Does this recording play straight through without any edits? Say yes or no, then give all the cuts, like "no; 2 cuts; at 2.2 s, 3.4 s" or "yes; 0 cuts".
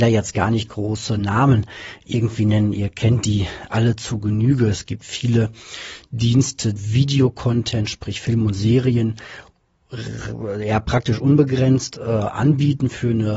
no; 1 cut; at 6.8 s